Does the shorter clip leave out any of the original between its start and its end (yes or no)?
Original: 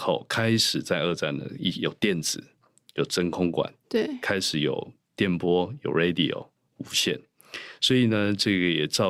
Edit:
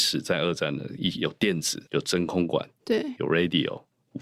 yes